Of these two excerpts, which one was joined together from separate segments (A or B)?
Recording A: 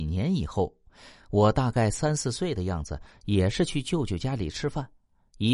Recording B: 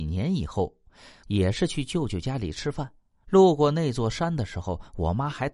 B